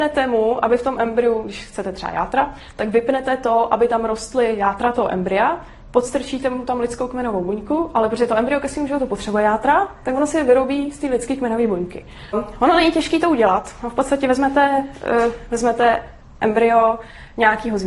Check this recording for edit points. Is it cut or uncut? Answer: cut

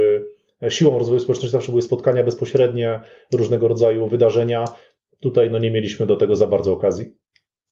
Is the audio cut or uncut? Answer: uncut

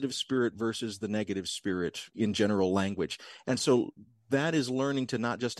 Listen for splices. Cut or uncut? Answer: uncut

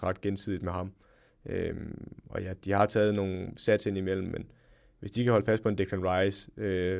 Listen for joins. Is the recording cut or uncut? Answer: uncut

